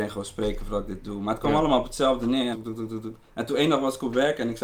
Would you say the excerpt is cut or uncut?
cut